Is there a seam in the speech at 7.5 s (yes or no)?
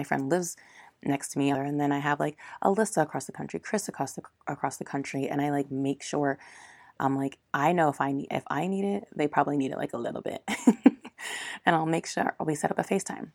no